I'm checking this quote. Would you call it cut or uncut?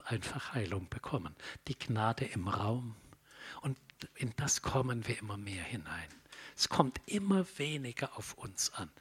uncut